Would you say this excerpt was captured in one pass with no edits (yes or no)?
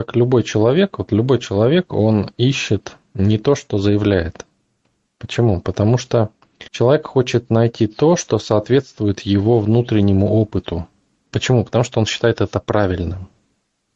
no